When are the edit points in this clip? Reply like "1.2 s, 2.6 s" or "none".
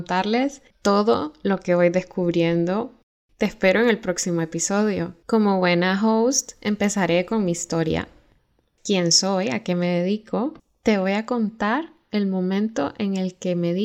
none